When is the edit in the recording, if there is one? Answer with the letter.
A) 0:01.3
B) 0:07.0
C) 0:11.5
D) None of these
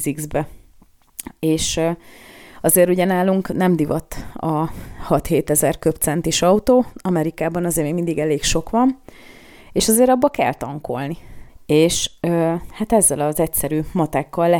C